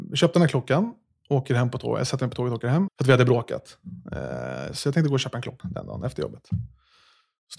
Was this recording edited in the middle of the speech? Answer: yes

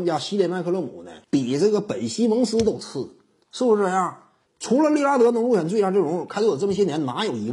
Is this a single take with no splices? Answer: no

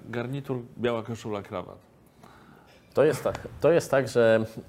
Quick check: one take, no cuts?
yes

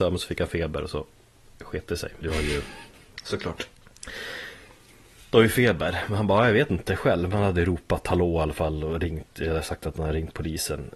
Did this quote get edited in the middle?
yes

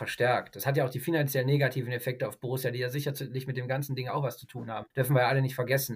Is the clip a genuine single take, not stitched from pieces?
no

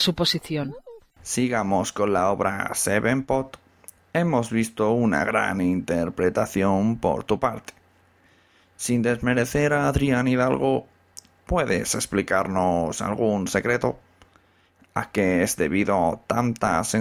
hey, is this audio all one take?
yes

